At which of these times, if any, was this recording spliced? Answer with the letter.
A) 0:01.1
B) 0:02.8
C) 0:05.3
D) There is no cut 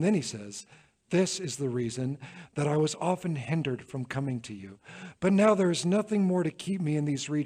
A